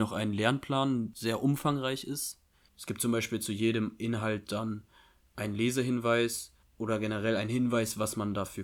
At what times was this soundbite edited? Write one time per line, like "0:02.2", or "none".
0:01.1
0:02.7